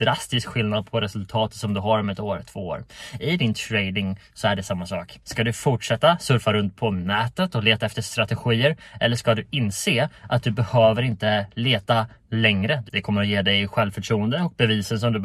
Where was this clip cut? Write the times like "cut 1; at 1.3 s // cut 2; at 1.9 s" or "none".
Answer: cut 1; at 5.2 s // cut 2; at 12.9 s